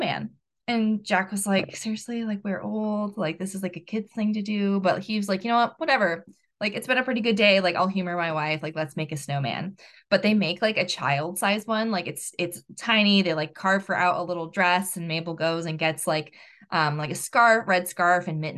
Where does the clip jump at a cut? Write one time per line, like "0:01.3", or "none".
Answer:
none